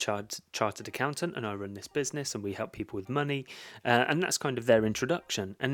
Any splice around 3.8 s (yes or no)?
no